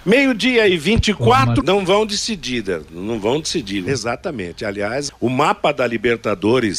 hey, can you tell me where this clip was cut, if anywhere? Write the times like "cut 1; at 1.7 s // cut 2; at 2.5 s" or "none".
cut 1; at 1.6 s // cut 2; at 3.9 s // cut 3; at 5.1 s